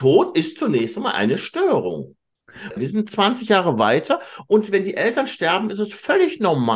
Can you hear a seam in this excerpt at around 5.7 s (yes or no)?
no